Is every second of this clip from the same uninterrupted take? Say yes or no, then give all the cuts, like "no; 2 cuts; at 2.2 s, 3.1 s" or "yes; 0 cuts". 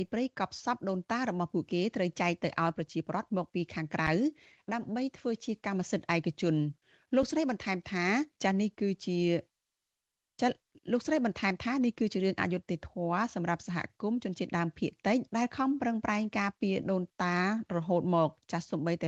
no; 2 cuts; at 8.3 s, 15.3 s